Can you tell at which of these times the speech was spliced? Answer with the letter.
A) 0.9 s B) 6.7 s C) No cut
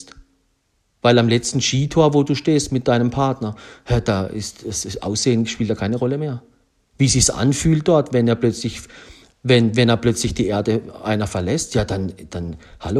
C